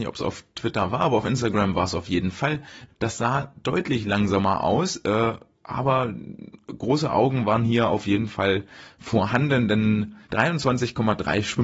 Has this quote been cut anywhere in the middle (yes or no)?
yes